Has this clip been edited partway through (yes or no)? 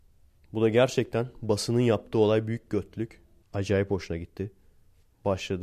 yes